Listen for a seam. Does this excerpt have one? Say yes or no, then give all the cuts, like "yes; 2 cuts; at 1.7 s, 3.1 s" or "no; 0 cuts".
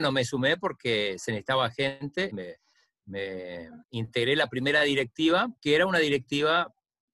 yes; 3 cuts; at 2.3 s, 3.8 s, 5.6 s